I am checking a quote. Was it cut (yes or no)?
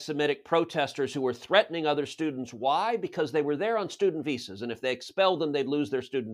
no